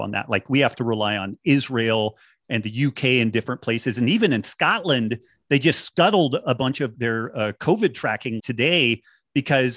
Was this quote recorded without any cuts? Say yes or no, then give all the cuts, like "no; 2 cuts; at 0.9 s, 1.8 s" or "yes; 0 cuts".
no; 2 cuts; at 6.9 s, 8.4 s